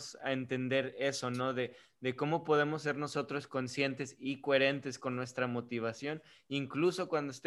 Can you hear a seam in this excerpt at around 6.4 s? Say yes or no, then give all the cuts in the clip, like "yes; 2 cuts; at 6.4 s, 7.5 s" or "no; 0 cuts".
no; 0 cuts